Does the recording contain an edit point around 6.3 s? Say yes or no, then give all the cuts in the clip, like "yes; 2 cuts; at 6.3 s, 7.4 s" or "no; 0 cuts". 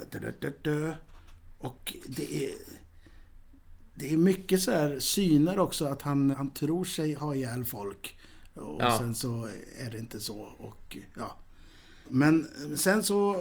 yes; 2 cuts; at 6.3 s, 12.0 s